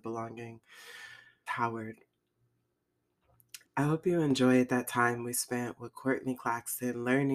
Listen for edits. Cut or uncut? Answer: cut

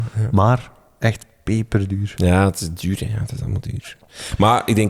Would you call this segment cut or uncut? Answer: uncut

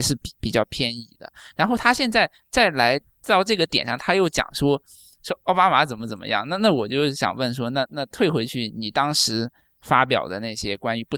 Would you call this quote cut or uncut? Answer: uncut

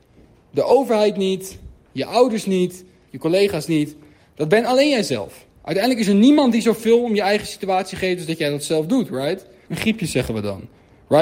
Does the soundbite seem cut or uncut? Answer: cut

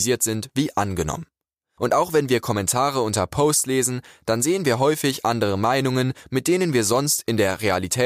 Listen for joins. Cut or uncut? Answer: uncut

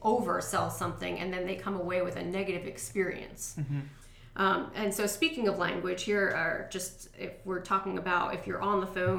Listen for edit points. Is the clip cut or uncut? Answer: uncut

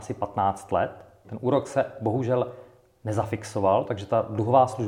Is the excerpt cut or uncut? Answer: cut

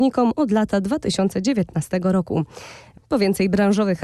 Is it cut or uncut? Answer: uncut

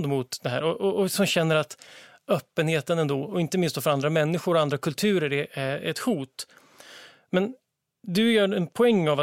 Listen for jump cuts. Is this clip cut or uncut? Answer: uncut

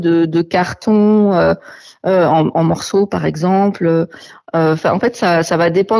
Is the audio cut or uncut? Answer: cut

